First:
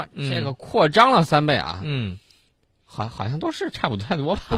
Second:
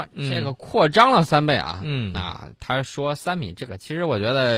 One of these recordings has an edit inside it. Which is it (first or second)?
second